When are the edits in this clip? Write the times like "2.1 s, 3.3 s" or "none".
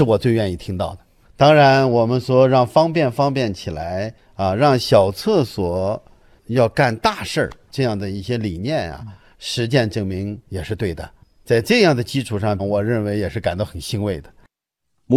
12.6 s